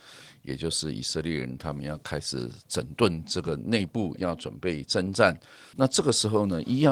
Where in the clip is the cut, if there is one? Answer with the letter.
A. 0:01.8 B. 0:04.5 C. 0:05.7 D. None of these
C